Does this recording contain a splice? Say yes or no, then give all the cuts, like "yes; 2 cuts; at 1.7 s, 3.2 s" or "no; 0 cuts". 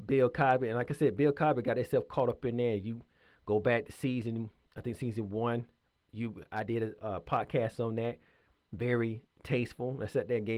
no; 0 cuts